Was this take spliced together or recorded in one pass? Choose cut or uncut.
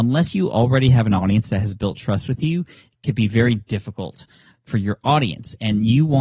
uncut